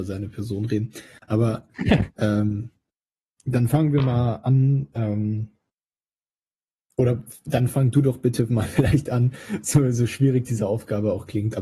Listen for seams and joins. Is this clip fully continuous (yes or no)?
yes